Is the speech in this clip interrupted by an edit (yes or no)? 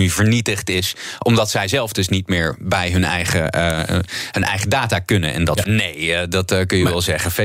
yes